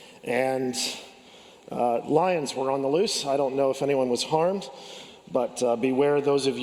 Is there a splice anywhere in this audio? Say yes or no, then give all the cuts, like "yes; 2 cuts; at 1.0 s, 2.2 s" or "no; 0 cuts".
no; 0 cuts